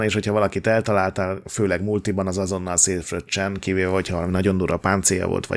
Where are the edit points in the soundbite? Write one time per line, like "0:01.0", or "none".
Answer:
none